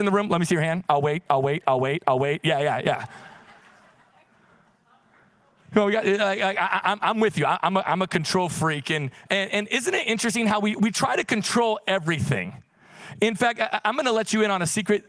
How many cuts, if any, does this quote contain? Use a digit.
0